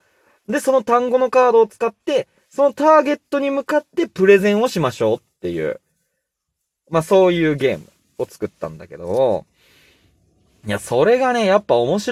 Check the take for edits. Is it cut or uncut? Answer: uncut